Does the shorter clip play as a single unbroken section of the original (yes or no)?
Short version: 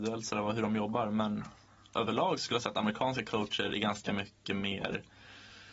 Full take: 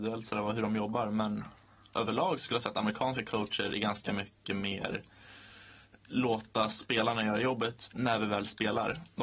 yes